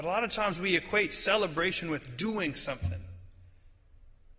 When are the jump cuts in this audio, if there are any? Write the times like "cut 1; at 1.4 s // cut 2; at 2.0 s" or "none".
none